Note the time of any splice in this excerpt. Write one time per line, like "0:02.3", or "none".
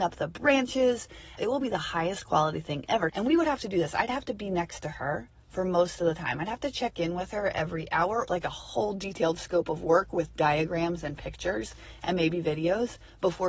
0:01.4
0:03.1
0:08.3